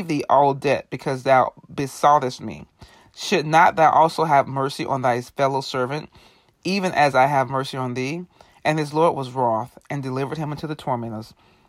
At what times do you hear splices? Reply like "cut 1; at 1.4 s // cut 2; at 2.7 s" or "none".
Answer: none

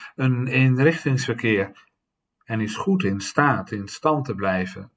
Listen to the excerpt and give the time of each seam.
none

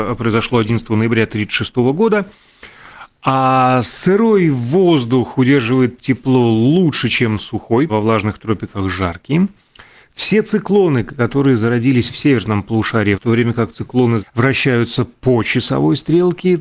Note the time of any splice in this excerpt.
cut 1; at 7.9 s // cut 2; at 13.1 s // cut 3; at 14.2 s

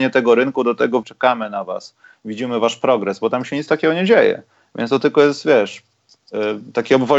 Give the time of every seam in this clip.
cut 1; at 1.0 s

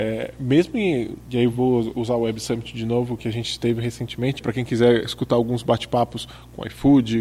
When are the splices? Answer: cut 1; at 3.2 s // cut 2; at 4.4 s

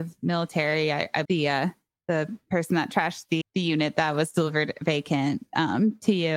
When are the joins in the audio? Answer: cut 1; at 1.2 s // cut 2; at 3.4 s

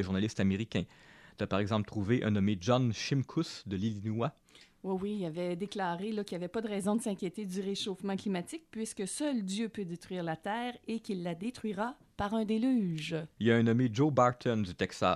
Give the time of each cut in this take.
cut 1; at 13.4 s

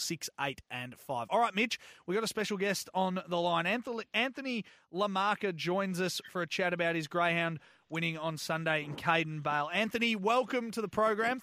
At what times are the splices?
none

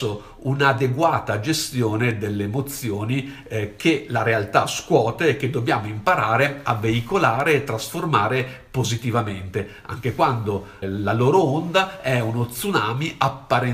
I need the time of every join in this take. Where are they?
cut 1; at 10.8 s

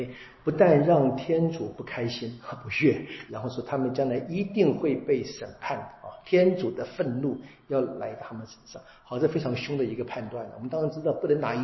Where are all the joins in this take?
cut 1; at 3.3 s

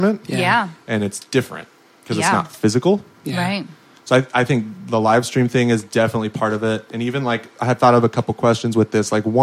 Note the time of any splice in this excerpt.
none

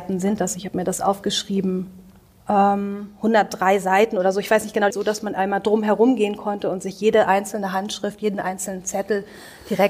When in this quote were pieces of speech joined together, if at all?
cut 1; at 4.9 s

